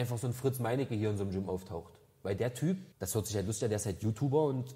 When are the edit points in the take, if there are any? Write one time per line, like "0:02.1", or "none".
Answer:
0:02.9